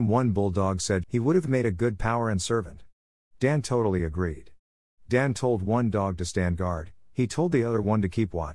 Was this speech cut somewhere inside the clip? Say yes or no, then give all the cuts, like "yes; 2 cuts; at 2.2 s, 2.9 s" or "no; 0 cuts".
yes; 1 cut; at 1.0 s